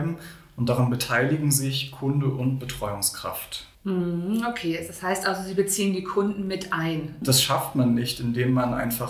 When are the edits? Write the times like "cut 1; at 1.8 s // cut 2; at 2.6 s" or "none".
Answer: cut 1; at 3.7 s // cut 2; at 7.2 s